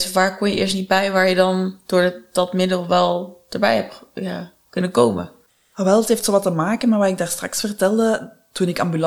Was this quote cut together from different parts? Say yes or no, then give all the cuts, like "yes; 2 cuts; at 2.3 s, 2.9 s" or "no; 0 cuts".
no; 0 cuts